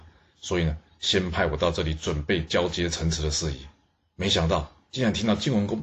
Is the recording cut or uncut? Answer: uncut